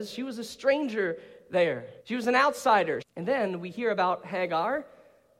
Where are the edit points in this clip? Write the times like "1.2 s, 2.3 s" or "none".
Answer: 2.0 s, 3.0 s

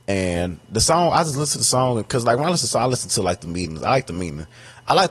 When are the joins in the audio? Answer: none

